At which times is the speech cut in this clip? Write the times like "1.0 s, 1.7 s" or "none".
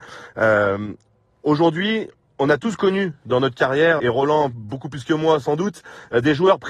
4.0 s